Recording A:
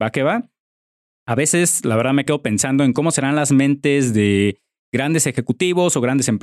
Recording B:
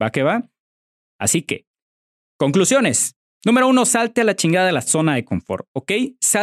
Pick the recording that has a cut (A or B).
B